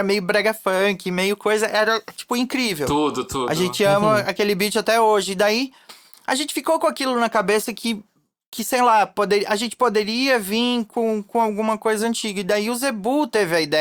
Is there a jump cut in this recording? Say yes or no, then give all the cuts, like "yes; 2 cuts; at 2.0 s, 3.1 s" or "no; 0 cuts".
no; 0 cuts